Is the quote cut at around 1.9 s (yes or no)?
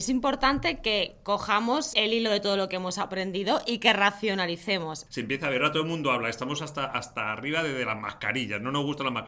yes